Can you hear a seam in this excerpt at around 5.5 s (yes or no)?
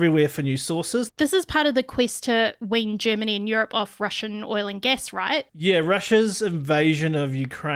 yes